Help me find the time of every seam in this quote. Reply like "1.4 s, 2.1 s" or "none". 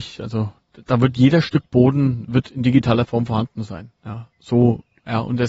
4.0 s